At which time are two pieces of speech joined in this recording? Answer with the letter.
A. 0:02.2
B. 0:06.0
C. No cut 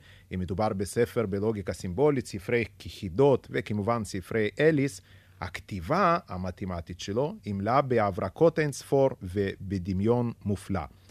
C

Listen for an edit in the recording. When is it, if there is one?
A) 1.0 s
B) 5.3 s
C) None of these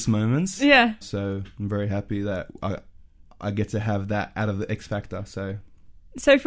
A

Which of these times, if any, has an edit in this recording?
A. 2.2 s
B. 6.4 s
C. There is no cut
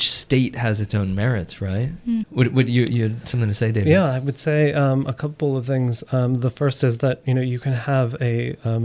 A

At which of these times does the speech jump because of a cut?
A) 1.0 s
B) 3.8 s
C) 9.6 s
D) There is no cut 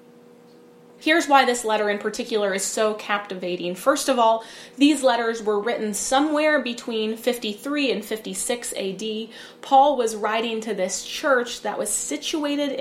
A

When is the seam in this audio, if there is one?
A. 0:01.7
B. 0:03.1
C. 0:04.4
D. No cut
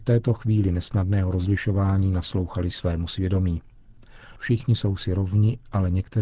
C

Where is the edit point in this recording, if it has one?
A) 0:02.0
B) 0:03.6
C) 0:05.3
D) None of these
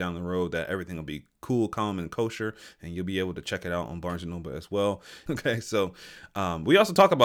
C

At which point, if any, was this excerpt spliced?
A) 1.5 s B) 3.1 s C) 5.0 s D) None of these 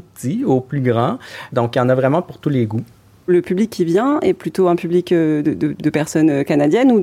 A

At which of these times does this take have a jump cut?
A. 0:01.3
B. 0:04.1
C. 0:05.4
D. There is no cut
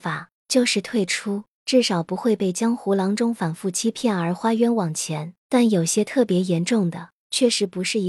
C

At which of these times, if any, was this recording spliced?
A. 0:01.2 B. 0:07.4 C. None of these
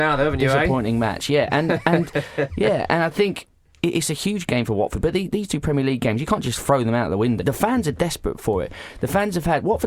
B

